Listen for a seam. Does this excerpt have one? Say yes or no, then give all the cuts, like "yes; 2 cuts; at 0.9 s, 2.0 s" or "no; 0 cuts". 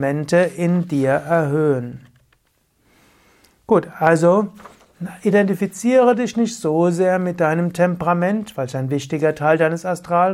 no; 0 cuts